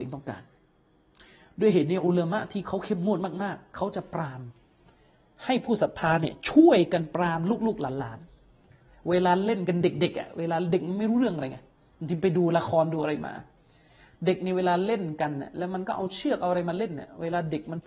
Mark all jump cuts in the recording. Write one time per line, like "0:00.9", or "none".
none